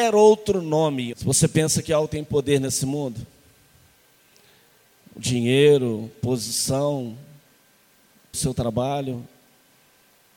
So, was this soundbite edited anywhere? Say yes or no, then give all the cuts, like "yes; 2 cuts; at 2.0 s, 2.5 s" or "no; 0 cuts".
yes; 2 cuts; at 1.1 s, 8.3 s